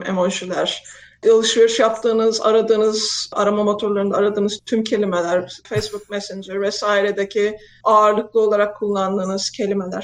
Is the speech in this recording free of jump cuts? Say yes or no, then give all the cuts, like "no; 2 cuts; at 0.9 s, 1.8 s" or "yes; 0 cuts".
no; 2 cuts; at 4.6 s, 5.6 s